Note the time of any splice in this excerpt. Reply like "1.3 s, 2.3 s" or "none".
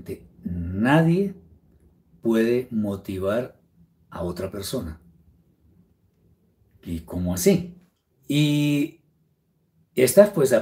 8.1 s